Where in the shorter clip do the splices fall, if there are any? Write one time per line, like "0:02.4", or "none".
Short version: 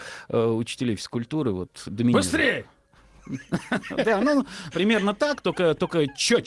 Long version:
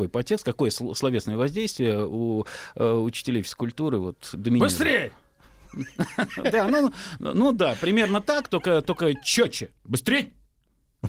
0:04.7